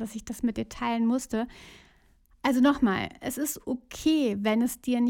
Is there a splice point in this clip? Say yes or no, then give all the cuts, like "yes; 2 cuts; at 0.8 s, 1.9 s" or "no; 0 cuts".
no; 0 cuts